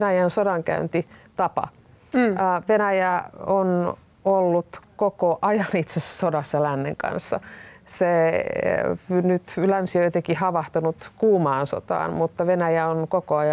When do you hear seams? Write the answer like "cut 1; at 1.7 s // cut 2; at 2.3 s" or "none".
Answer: none